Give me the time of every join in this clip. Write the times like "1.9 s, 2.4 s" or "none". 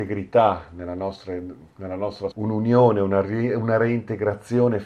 2.3 s